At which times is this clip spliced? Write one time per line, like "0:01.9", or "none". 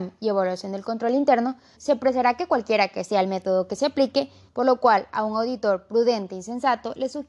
0:01.7
0:04.5